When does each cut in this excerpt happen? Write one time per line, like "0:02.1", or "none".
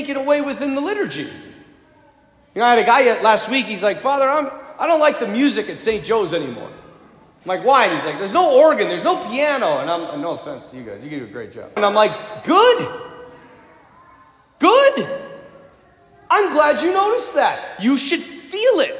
0:11.8